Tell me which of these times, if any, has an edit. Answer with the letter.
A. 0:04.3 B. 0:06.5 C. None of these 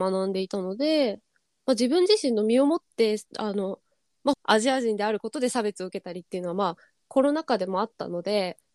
A